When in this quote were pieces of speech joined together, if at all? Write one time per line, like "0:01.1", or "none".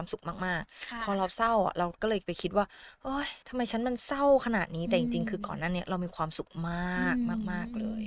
0:03.4

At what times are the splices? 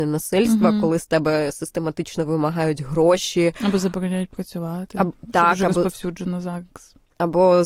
none

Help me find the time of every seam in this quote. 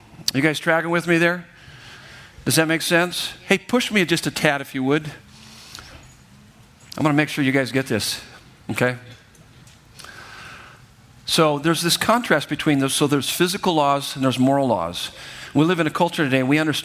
none

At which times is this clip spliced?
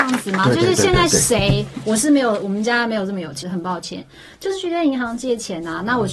0:03.4

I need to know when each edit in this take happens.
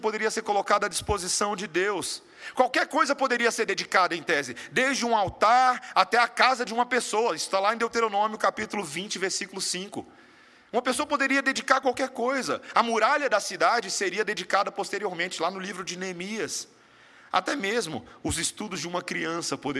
none

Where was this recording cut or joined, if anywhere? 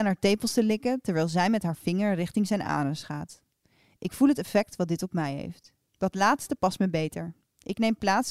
0:05.8

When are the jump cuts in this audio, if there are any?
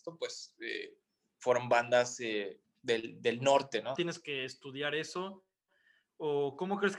0:04.0

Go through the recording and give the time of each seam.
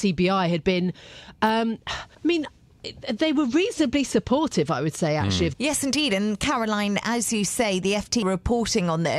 0:02.1
0:05.5
0:08.2

